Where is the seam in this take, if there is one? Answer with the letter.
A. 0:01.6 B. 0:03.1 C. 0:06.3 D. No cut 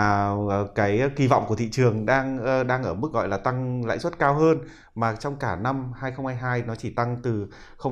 B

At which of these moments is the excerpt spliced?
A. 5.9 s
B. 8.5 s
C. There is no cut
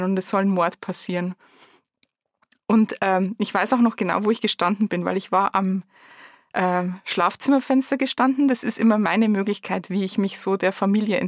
C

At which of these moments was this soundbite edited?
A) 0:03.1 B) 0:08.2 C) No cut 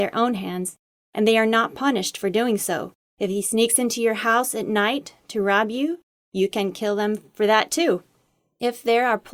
A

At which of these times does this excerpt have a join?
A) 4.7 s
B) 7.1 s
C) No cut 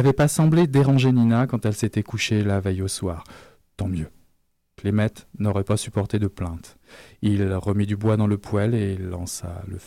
C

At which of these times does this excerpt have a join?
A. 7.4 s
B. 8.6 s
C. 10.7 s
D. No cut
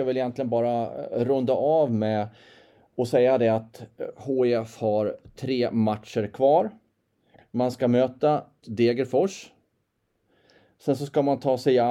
B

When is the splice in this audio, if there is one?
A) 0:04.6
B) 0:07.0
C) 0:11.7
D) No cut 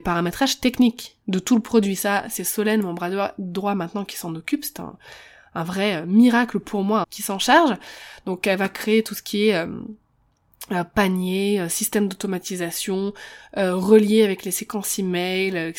B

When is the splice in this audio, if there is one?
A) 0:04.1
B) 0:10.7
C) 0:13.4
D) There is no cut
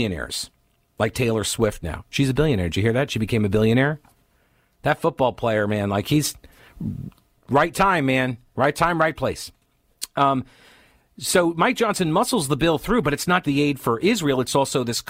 C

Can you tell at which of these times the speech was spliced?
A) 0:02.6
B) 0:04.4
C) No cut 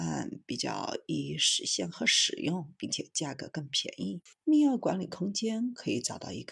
B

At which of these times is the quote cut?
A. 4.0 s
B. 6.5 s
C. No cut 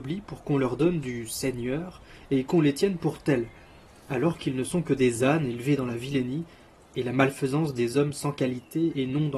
C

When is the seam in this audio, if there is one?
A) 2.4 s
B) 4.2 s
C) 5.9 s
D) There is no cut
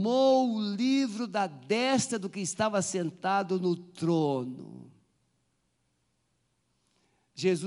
D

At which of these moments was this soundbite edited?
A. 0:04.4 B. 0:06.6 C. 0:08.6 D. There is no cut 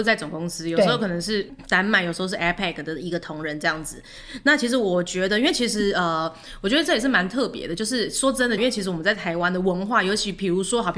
C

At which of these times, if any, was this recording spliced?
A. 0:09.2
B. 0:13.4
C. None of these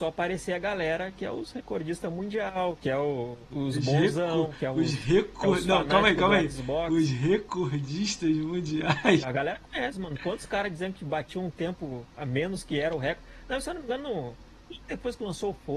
A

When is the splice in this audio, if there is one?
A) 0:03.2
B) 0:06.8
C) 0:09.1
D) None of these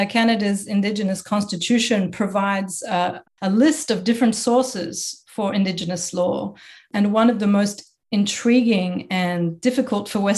A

